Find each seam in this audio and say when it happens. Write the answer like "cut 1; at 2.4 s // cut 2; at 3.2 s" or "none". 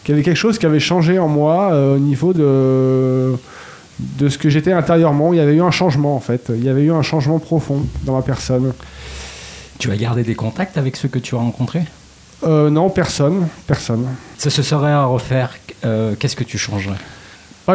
none